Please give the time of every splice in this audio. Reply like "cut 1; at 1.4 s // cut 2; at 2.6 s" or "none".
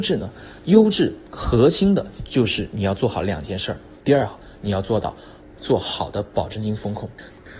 cut 1; at 4.0 s